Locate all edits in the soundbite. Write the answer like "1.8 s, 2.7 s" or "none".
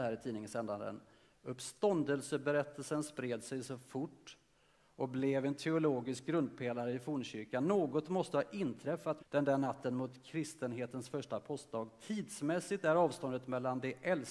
9.2 s